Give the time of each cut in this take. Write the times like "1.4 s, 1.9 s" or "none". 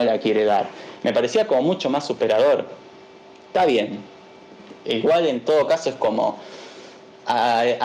none